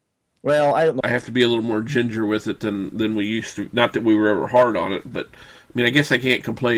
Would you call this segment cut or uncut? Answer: cut